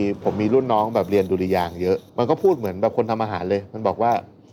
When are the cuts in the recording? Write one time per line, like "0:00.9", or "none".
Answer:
0:02.1